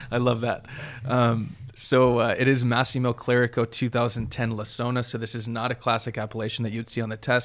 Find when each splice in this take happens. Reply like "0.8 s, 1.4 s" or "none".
none